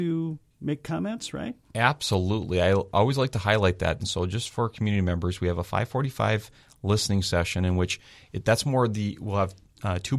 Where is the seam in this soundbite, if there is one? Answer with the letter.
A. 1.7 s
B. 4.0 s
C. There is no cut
B